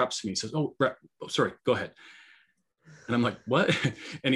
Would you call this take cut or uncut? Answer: cut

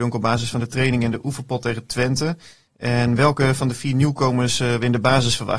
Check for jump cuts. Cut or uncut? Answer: uncut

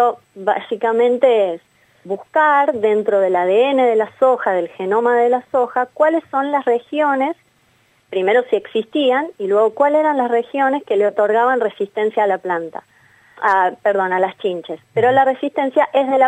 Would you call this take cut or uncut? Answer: uncut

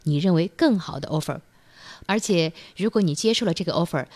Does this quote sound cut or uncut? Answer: cut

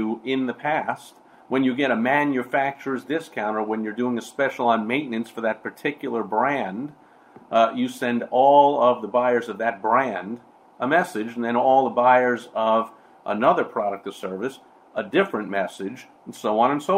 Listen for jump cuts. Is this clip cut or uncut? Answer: uncut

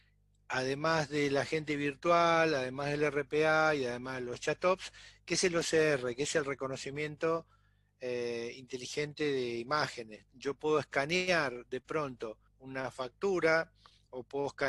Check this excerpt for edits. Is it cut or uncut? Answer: cut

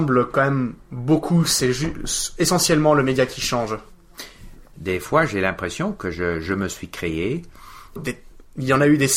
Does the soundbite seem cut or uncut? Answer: cut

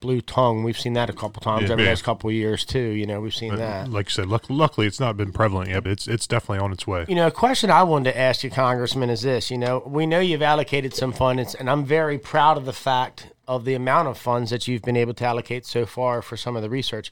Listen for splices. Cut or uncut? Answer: cut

